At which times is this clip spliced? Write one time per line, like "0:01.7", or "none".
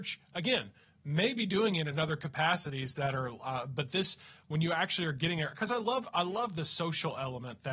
none